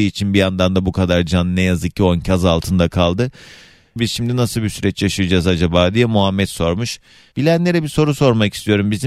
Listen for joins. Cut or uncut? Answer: cut